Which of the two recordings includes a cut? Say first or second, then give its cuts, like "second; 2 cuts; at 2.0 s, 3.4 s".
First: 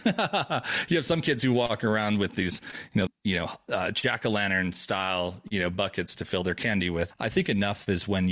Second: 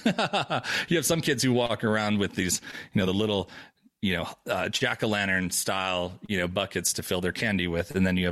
first; 2 cuts; at 3.1 s, 7.1 s